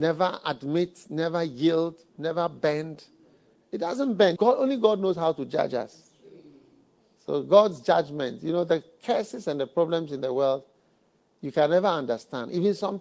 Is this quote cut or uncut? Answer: cut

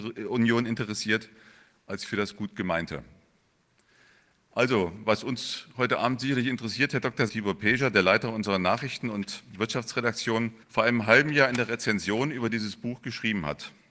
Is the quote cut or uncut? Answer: cut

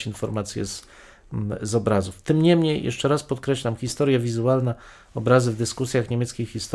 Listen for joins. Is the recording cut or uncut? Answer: uncut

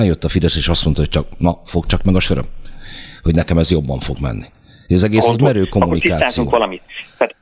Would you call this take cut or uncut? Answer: uncut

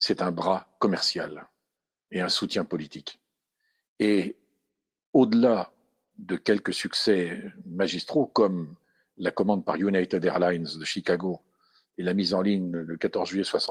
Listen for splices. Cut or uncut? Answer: uncut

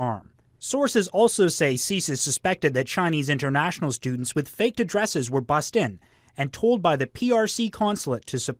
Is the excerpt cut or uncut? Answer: uncut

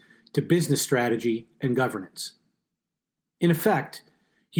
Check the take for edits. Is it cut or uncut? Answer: uncut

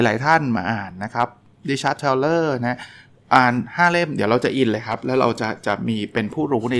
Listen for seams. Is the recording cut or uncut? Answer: uncut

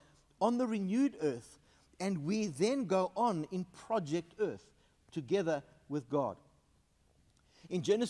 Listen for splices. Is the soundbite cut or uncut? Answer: uncut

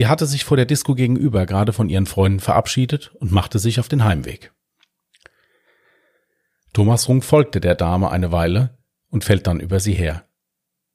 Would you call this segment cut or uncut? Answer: uncut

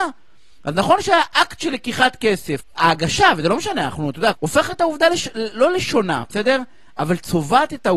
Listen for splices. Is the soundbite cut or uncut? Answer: cut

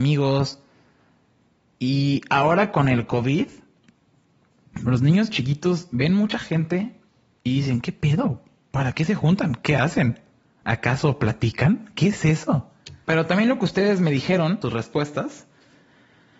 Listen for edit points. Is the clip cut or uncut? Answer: cut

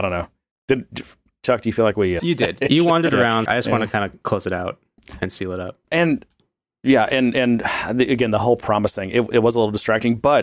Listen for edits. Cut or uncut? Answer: cut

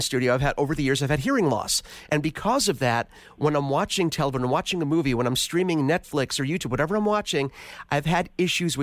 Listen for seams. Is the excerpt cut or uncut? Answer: cut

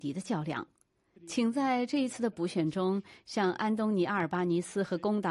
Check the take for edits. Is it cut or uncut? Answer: cut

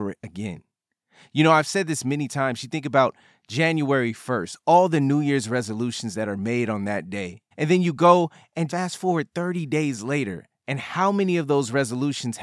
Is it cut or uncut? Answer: cut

